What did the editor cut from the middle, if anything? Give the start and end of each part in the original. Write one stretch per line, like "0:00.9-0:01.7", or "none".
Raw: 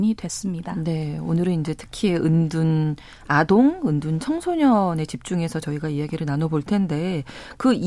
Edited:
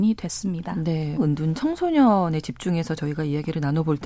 0:01.2-0:03.8